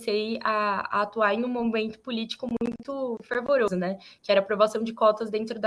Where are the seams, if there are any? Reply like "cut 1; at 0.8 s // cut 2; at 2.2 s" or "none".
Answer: none